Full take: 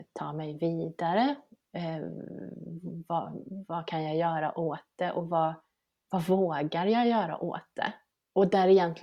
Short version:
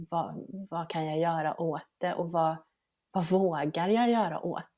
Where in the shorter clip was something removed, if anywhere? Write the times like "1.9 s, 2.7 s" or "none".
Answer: none